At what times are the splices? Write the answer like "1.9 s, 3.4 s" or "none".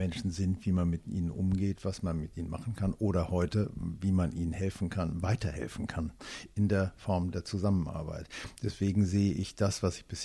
none